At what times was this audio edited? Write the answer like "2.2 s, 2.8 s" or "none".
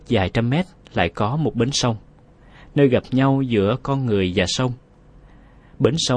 none